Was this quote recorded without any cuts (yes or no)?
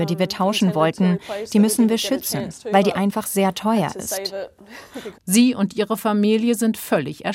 no